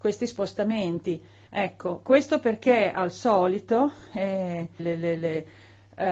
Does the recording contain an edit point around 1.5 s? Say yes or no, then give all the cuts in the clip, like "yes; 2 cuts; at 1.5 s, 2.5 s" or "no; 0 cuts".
yes; 2 cuts; at 1.5 s, 4.8 s